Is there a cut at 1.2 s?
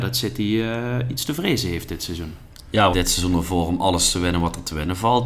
no; 1 cut; at 2.9 s

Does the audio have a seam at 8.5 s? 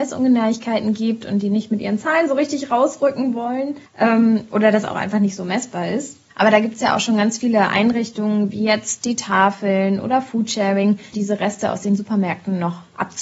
no; 1 cut; at 11.1 s

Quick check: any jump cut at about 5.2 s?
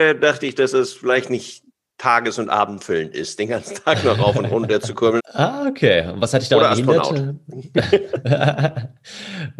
yes; 1 cut; at 5.2 s

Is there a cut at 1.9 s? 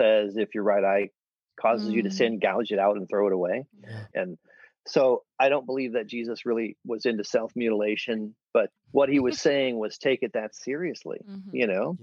no; 2 cuts; at 4.1 s, 8.8 s

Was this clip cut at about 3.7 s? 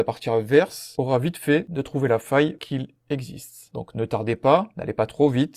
yes; 1 cut; at 3.7 s

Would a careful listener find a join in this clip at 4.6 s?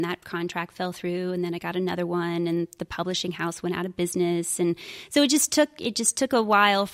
no; 0 cuts

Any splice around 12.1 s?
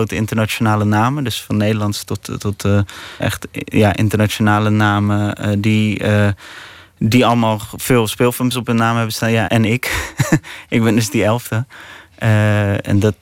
no; 2 cuts; at 3.2 s, 9.4 s

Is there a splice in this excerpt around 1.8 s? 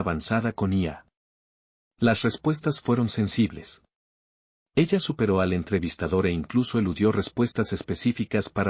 yes; 1 cut; at 1.8 s

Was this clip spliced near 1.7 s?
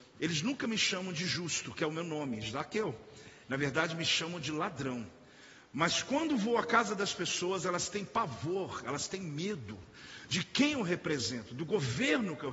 no; 0 cuts

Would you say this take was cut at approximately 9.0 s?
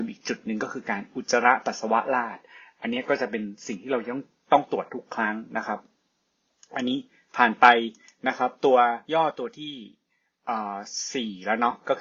yes; 1 cut; at 9.0 s

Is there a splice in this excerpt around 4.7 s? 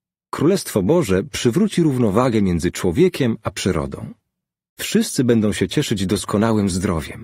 yes; 1 cut; at 4.7 s

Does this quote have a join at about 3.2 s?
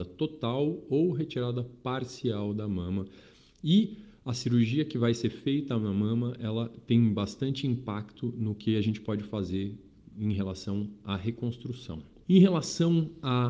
no; 1 cut; at 12.2 s

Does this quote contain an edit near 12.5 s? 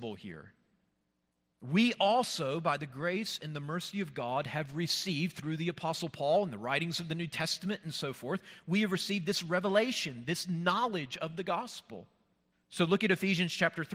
yes; 1 cut; at 12.5 s

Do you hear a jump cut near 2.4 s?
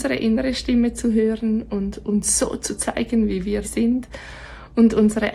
no; 1 cut; at 3.6 s

